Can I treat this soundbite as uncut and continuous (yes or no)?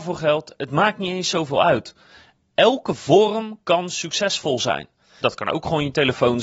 no